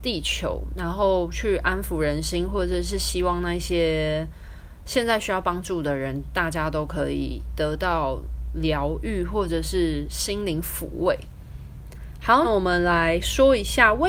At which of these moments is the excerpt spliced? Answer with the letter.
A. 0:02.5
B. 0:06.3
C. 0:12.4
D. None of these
C